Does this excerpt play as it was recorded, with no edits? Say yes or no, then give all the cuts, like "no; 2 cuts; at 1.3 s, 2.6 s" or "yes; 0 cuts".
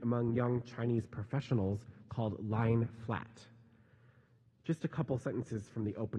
yes; 0 cuts